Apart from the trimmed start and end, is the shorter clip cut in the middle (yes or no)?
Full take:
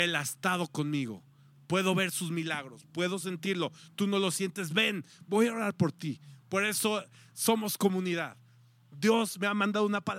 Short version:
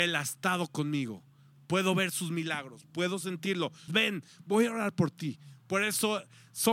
yes